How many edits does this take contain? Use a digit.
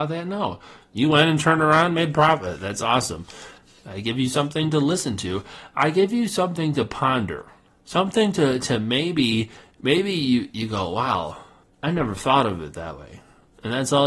1